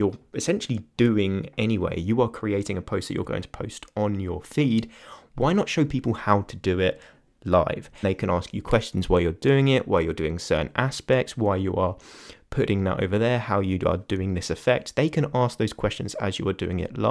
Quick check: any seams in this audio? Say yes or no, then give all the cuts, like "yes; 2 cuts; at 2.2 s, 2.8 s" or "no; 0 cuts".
yes; 1 cut; at 8.0 s